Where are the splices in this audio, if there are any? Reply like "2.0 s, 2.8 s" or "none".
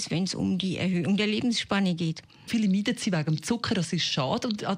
2.5 s